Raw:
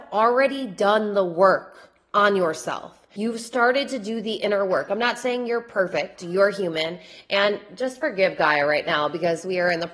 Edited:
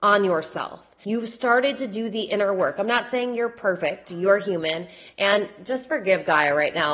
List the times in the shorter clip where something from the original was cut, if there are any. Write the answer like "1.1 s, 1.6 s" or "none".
none